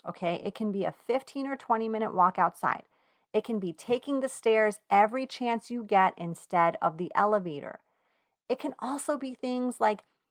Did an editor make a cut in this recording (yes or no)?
yes